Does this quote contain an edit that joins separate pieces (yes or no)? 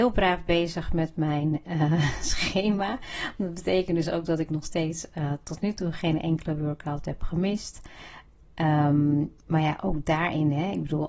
no